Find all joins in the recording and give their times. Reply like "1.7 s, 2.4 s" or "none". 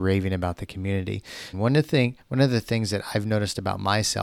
1.5 s